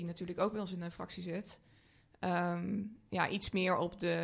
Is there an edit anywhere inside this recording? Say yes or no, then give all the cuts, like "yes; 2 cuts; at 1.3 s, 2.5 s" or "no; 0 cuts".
yes; 1 cut; at 3.1 s